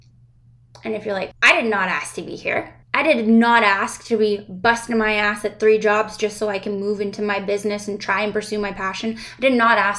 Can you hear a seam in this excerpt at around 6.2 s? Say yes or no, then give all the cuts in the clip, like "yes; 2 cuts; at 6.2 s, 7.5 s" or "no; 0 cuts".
no; 2 cuts; at 1.3 s, 2.8 s